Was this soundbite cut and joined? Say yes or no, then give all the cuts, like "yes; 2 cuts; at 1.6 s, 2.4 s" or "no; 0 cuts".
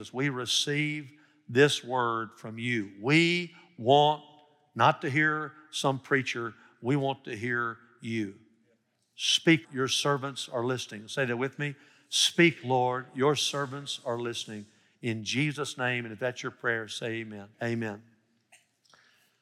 yes; 2 cuts; at 9.6 s, 17.5 s